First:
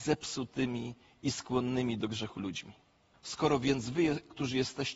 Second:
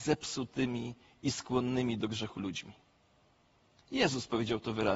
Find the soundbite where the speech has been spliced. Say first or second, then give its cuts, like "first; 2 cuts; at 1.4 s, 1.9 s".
first; 1 cut; at 3.1 s